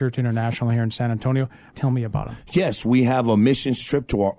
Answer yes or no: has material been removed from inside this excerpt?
yes